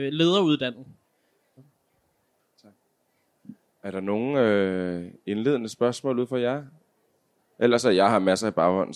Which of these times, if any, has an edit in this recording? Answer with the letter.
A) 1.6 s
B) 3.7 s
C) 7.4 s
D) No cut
A